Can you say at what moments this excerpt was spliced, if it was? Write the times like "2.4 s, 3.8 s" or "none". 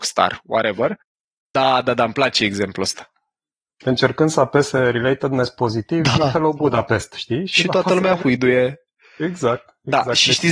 1.5 s